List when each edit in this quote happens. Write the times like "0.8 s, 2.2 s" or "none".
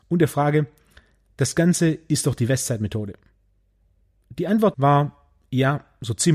4.7 s